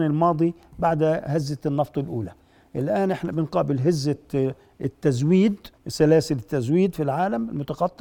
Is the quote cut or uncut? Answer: cut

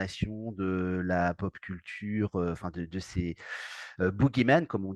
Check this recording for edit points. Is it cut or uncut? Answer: uncut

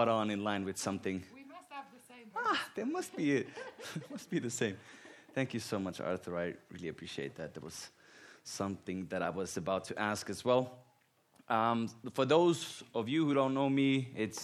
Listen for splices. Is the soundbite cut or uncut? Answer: uncut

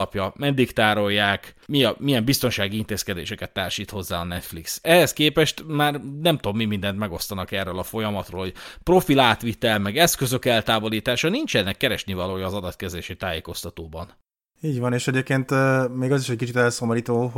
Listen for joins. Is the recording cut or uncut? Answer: cut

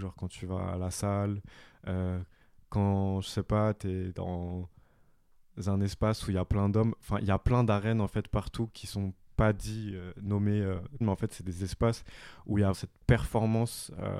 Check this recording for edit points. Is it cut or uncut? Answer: cut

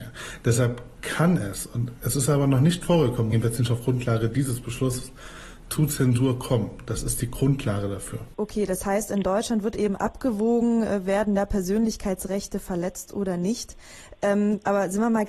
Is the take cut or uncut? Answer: cut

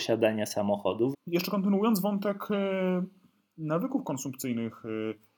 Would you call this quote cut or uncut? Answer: cut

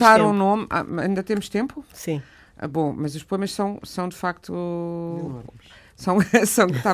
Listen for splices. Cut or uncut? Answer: uncut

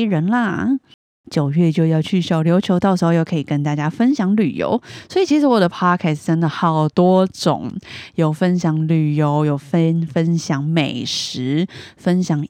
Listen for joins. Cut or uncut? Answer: uncut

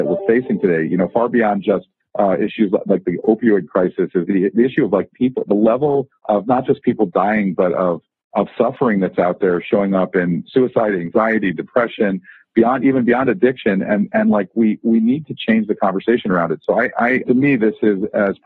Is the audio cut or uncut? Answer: cut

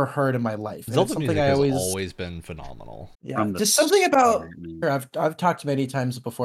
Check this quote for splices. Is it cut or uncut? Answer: cut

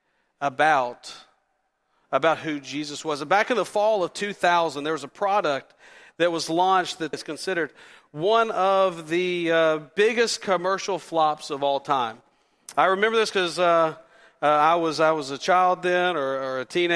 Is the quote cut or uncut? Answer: cut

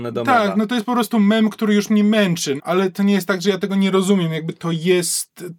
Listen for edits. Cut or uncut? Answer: cut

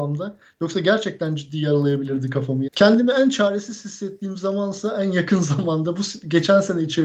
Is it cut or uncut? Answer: cut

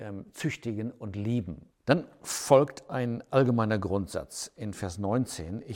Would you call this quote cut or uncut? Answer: cut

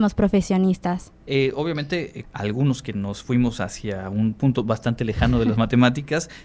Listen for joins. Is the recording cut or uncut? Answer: cut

